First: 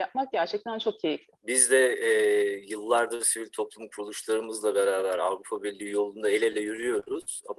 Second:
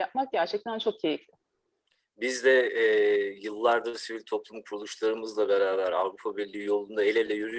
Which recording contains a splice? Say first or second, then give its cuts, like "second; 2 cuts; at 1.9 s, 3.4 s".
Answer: first; 1 cut; at 1.4 s